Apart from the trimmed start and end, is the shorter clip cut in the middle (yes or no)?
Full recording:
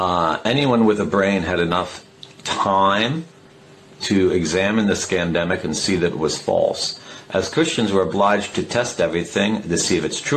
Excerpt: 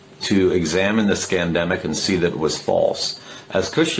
no